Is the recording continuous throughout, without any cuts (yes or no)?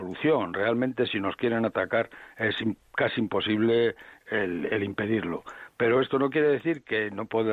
yes